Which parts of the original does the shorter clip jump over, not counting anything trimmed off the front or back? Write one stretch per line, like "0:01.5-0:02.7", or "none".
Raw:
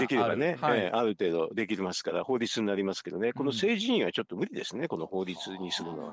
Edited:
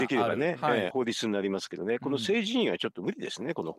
0:00.9-0:02.2